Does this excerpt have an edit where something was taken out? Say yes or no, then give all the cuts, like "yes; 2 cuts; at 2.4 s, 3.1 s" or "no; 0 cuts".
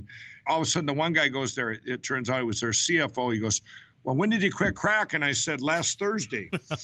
no; 0 cuts